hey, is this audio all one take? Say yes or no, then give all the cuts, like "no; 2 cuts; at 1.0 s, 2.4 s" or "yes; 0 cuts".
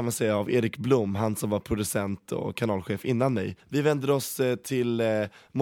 no; 1 cut; at 3.6 s